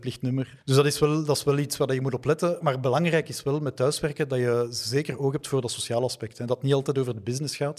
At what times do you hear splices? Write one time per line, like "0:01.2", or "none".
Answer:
none